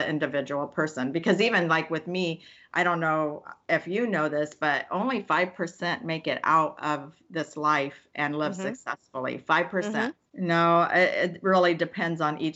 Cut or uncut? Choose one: cut